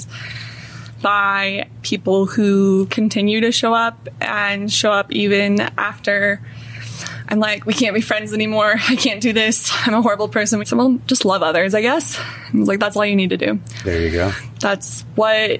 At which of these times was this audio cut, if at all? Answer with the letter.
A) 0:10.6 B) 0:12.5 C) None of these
A